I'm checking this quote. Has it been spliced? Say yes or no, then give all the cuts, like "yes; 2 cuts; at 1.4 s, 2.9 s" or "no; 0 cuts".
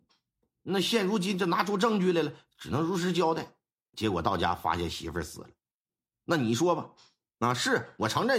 yes; 1 cut; at 3.9 s